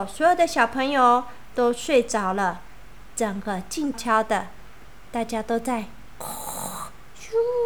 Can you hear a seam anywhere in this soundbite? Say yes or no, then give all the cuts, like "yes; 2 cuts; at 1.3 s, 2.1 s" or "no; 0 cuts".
yes; 1 cut; at 3.9 s